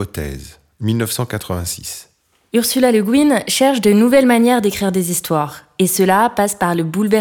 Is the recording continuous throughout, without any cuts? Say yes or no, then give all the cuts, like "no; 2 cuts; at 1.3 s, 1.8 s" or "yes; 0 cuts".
yes; 0 cuts